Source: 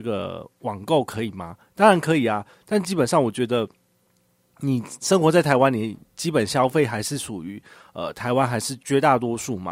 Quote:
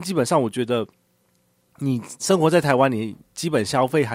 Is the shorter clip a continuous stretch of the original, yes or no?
yes